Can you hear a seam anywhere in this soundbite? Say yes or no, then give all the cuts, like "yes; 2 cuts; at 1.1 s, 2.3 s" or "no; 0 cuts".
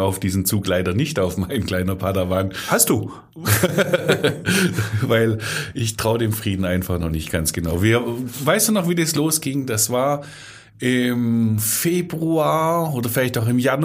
no; 0 cuts